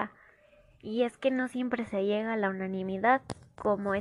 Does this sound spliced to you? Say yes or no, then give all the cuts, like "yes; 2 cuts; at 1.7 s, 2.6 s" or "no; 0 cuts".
no; 0 cuts